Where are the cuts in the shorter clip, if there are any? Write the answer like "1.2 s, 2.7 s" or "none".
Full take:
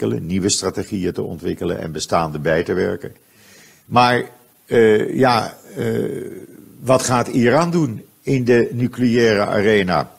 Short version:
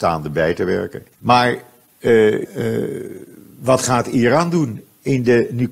1.1 s, 2.4 s